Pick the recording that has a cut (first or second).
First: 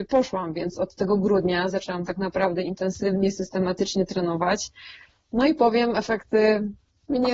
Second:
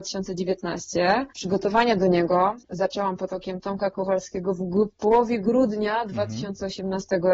second